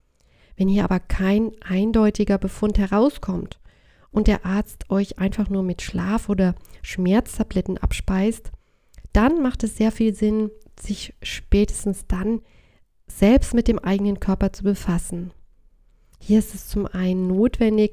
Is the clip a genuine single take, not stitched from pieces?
yes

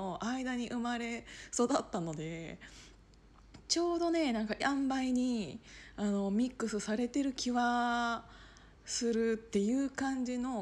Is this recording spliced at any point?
yes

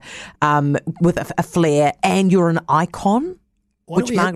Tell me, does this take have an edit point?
no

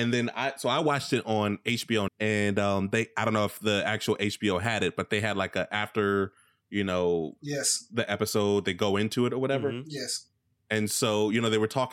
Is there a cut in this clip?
yes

